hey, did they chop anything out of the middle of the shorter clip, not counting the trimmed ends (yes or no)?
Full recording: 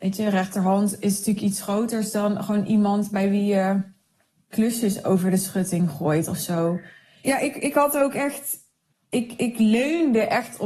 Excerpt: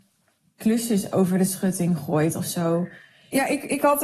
no